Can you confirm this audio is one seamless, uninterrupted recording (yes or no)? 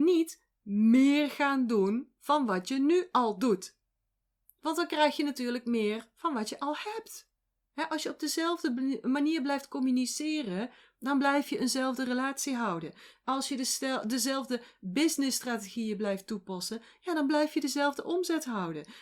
yes